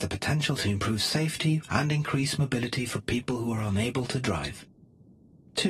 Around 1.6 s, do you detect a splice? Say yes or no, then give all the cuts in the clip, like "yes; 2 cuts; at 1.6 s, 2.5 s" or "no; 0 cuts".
yes; 1 cut; at 1.6 s